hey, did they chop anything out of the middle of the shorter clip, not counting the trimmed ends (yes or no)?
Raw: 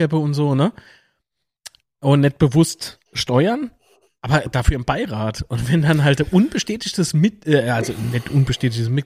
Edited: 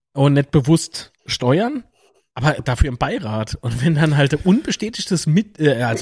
no